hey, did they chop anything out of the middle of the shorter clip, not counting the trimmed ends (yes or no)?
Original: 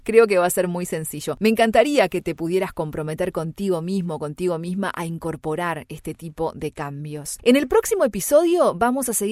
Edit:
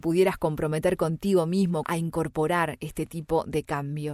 yes